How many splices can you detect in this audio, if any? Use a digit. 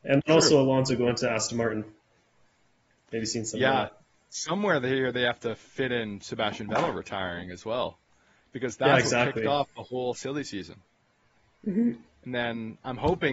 0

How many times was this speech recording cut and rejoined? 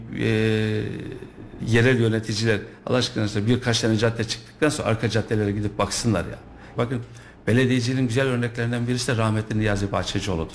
2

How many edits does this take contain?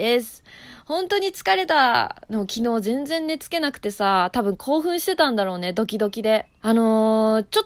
1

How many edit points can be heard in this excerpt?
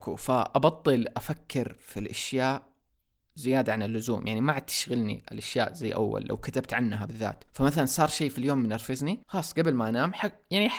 2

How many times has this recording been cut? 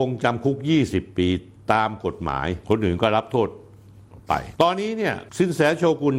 1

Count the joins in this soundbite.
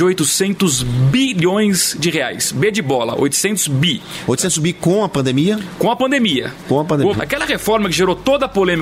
1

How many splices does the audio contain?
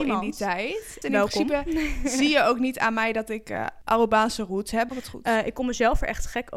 2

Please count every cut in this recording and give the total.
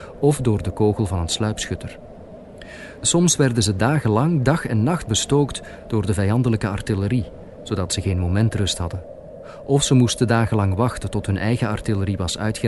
0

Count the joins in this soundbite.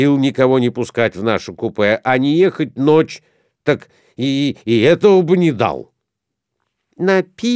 0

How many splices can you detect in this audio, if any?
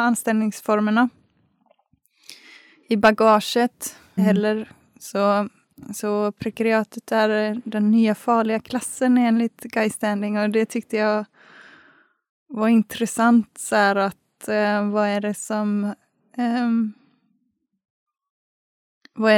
1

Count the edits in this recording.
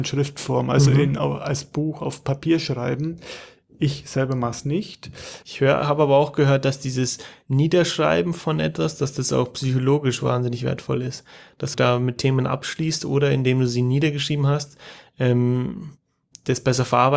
2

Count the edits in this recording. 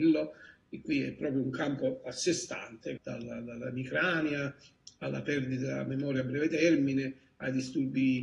1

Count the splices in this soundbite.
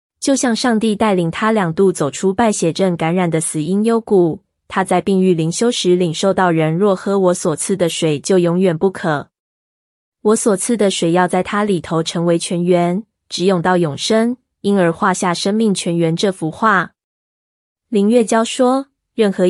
0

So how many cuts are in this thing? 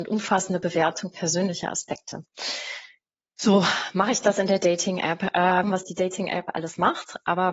1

